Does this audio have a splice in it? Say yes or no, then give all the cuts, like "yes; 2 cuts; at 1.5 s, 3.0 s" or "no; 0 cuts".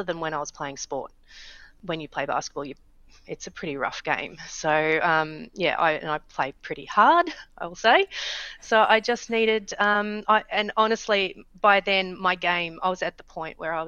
no; 0 cuts